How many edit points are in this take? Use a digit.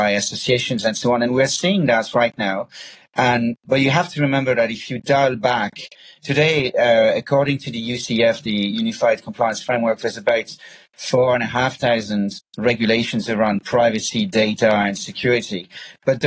0